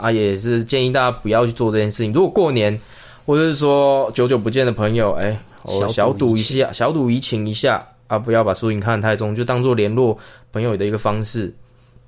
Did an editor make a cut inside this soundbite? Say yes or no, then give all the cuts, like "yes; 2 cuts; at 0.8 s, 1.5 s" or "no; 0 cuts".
no; 0 cuts